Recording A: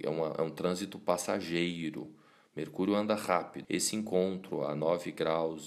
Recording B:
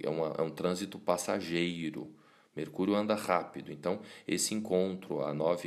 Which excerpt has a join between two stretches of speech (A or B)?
A